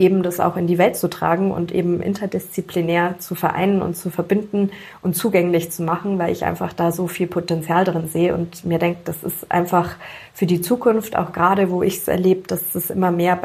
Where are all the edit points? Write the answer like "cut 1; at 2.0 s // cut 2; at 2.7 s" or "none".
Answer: none